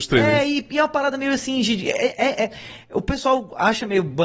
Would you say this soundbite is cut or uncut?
uncut